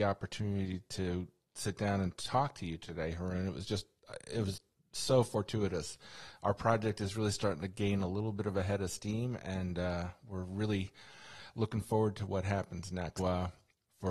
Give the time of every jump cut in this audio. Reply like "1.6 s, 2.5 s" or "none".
13.2 s